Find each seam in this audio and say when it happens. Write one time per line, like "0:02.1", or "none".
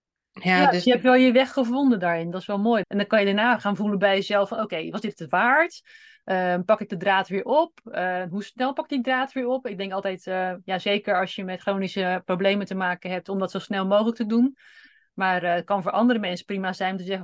0:02.8